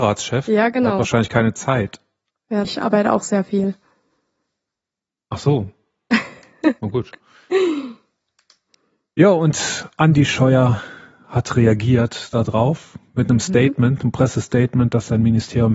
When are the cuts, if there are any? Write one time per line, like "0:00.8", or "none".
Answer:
0:02.6